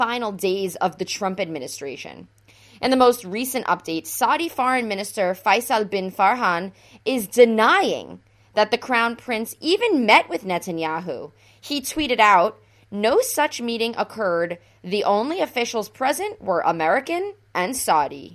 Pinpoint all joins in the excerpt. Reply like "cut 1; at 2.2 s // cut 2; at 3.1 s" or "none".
none